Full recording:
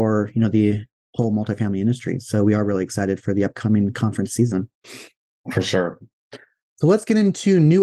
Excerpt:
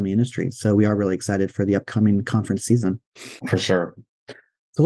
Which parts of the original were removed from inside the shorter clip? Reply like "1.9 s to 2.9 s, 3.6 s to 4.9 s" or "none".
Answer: 5.1 s to 5.4 s